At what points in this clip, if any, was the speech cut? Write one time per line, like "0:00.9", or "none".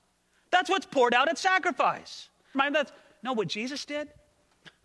0:02.5